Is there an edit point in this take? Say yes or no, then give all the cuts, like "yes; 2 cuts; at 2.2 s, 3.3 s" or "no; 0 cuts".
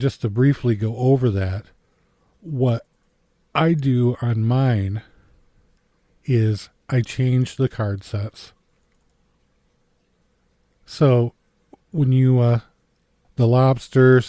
yes; 1 cut; at 13.2 s